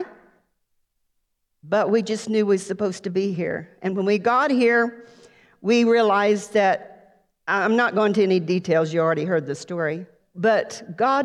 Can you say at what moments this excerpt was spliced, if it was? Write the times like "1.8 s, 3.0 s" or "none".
10.2 s